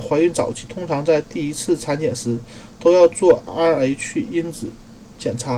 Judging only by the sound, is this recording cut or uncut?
uncut